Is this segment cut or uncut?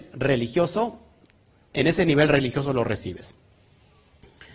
uncut